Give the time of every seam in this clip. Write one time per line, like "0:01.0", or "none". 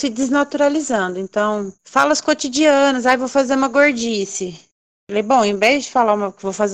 0:01.7